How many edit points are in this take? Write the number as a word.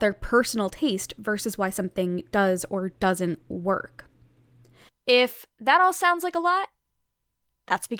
one